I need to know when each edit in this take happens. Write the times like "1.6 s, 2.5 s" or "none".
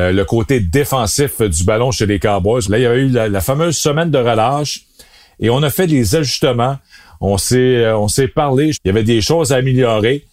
2.6 s, 8.7 s